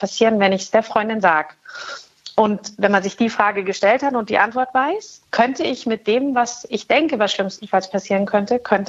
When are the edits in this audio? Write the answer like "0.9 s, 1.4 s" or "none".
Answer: 5.2 s